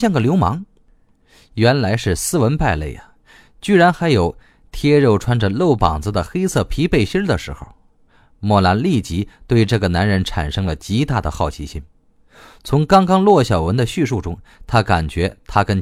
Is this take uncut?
yes; 0 cuts

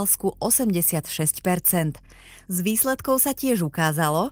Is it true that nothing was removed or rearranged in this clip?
yes; 0 cuts

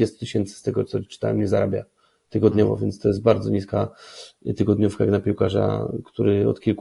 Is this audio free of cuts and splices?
yes; 0 cuts

